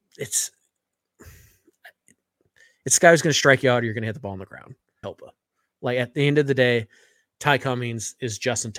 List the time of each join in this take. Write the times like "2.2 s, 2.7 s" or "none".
5.0 s